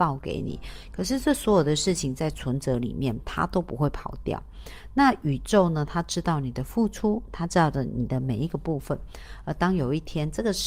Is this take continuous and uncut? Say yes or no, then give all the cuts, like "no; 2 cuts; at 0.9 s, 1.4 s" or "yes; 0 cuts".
yes; 0 cuts